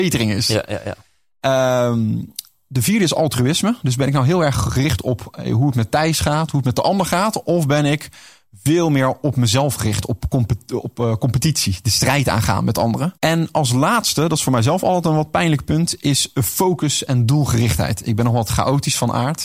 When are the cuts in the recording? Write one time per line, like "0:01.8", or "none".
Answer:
0:13.2